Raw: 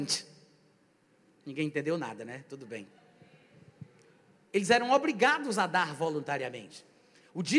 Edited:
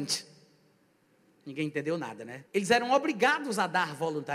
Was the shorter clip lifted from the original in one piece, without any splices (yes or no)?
no